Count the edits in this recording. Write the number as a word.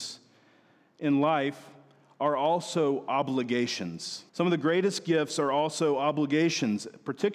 one